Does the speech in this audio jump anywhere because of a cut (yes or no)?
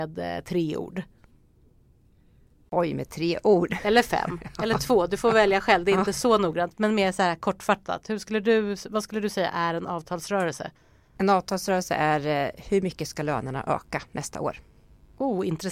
no